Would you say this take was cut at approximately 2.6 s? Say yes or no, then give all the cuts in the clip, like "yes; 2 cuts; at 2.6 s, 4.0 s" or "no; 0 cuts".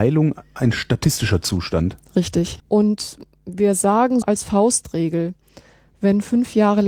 yes; 2 cuts; at 2.6 s, 4.2 s